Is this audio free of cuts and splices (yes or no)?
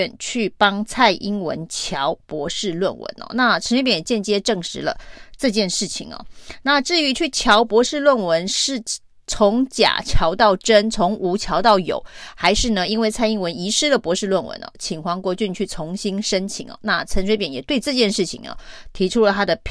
yes